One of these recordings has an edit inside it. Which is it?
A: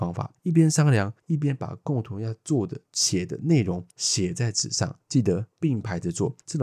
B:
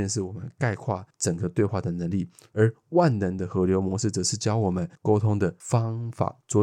B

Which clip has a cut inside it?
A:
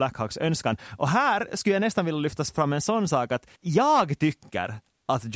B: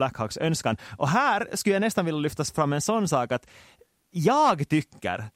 A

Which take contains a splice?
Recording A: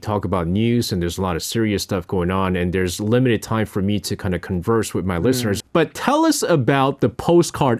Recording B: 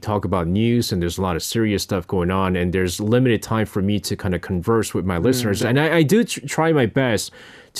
A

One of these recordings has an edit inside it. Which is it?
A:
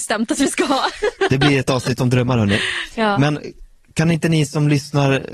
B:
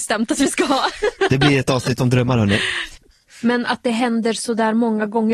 B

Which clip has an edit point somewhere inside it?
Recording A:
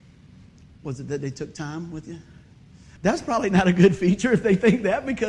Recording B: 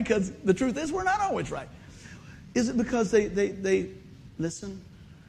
A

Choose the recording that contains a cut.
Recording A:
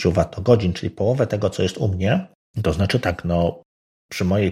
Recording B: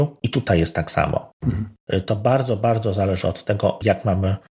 A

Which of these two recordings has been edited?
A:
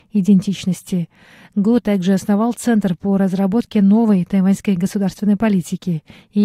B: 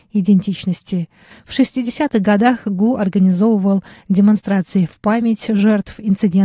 B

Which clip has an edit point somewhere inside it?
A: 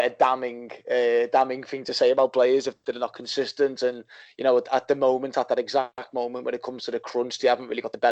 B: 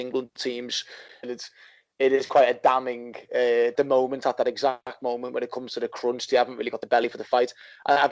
B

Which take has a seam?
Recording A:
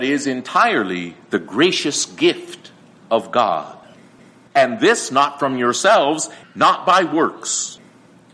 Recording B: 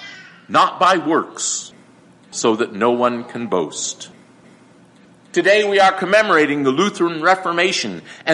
A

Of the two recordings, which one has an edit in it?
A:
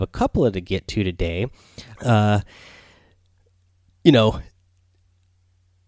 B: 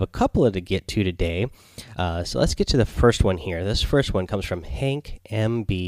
A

